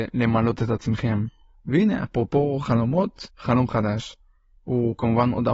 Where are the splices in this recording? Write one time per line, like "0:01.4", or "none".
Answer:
0:01.5
0:03.3